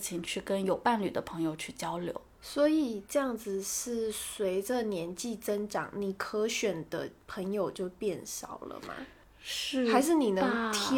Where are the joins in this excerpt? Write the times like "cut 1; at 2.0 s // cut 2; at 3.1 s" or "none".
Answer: none

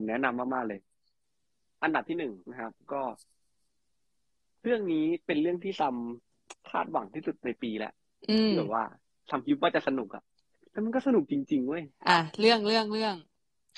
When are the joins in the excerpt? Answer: cut 1; at 2.4 s

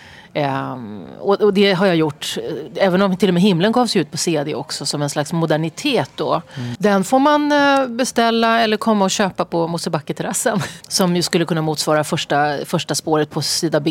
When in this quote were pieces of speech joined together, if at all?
cut 1; at 6.7 s // cut 2; at 10.8 s

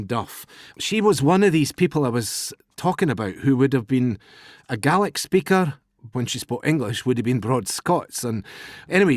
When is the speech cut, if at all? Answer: cut 1; at 6.1 s

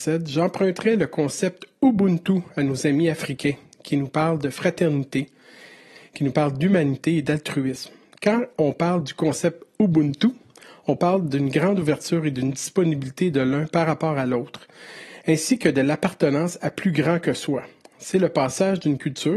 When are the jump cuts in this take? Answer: none

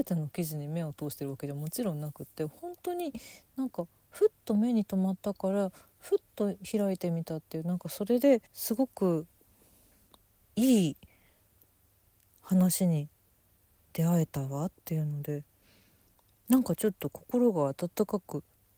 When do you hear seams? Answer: cut 1; at 8.5 s

